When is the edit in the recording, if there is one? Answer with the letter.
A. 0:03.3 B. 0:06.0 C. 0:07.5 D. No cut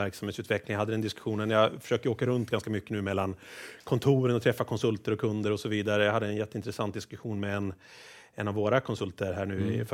D